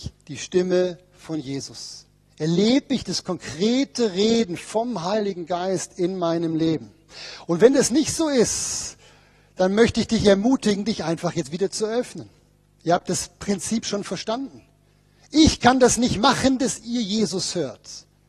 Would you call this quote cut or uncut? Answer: uncut